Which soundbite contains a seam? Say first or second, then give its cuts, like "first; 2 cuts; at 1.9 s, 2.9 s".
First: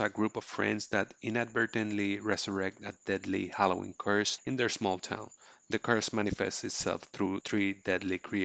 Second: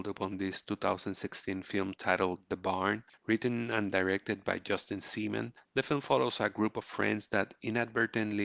second; 1 cut; at 3.1 s